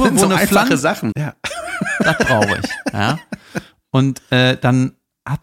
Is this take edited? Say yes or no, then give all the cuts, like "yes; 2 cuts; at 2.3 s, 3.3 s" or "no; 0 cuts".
yes; 1 cut; at 1.1 s